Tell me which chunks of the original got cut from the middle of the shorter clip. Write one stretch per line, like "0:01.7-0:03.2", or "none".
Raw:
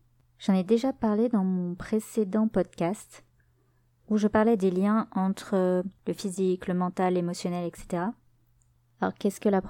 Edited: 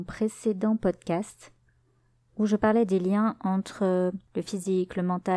none